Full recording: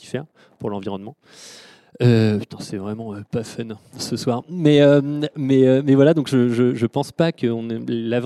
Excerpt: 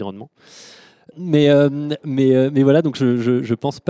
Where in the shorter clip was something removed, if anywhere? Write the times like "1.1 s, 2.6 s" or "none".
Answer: 1.1 s

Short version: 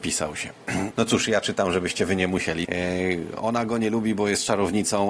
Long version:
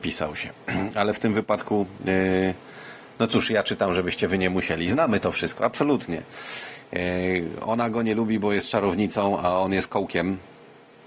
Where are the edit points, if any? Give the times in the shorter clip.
0.9 s, 2.6 s

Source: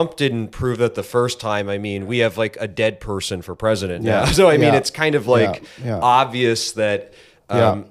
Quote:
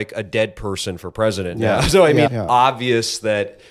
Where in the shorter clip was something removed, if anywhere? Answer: 2.3 s

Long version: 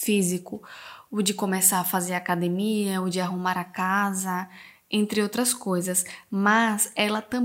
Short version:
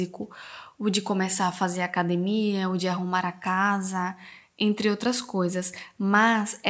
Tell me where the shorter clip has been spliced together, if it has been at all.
none

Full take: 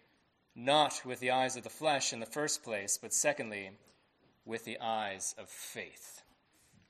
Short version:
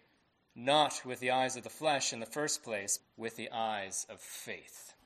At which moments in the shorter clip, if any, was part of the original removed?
3.0 s

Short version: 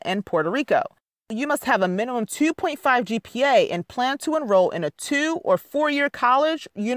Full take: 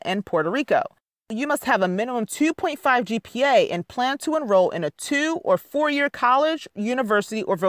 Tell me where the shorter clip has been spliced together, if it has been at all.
none

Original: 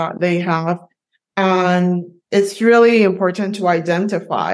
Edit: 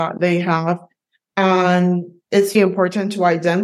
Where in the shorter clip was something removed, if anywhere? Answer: 2.5 s

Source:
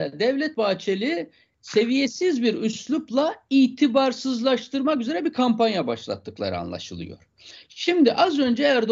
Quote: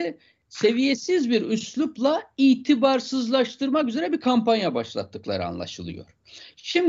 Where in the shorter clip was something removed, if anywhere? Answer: none

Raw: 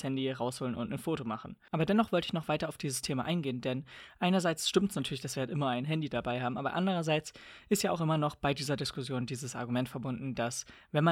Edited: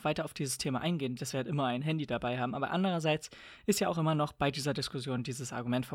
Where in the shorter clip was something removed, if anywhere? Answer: 1.2 s

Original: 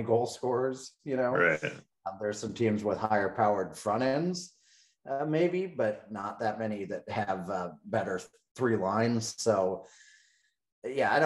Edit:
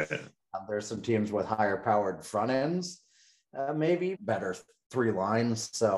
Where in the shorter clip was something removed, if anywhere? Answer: 4.1 s

